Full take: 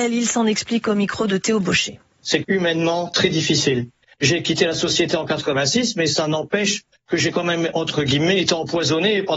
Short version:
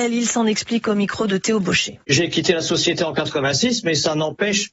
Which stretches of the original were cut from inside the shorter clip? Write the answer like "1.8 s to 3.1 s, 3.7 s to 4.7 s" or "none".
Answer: 2.0 s to 4.2 s